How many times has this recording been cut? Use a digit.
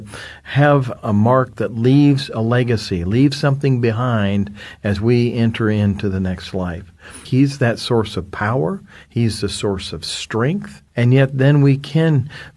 1